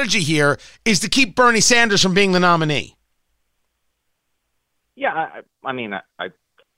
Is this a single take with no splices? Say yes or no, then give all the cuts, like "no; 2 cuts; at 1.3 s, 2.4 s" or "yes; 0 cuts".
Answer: yes; 0 cuts